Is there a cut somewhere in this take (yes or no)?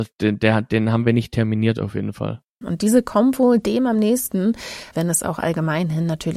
yes